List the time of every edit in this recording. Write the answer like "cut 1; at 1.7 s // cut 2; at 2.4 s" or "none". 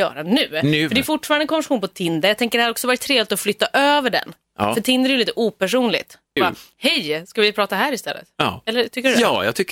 cut 1; at 6.4 s